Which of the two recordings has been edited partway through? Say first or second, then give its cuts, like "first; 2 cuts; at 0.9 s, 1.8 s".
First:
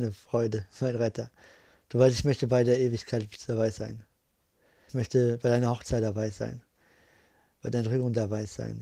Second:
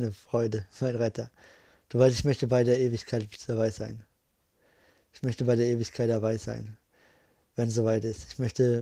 first; 1 cut; at 4.9 s